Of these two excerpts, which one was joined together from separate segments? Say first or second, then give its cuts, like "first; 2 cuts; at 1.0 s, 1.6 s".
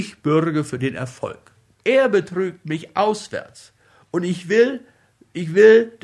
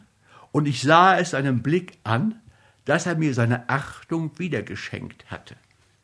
first; 1 cut; at 1.7 s